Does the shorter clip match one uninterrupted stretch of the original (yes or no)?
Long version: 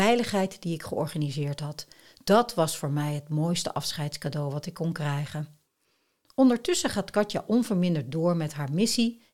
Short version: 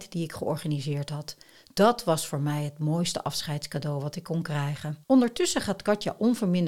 no